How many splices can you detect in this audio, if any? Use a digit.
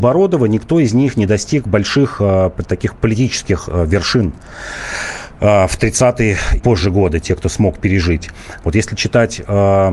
2